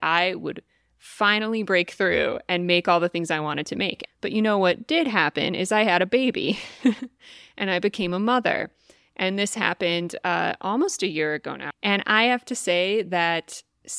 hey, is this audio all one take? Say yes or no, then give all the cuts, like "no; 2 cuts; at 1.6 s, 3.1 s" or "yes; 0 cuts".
no; 2 cuts; at 4.0 s, 11.7 s